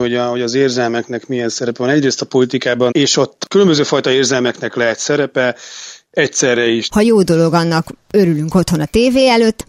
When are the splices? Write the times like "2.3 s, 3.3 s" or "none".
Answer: 2.9 s, 6.9 s